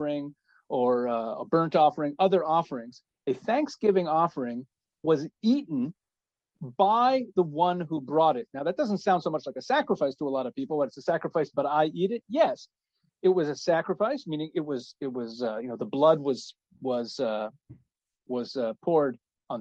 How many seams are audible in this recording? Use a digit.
0